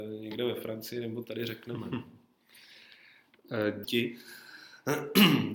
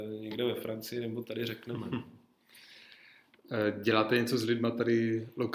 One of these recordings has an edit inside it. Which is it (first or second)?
first